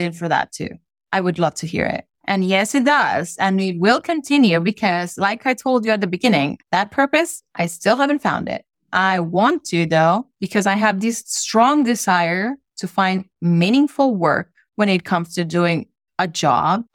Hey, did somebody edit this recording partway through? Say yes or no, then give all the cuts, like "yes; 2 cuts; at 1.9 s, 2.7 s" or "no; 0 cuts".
yes; 1 cut; at 2.2 s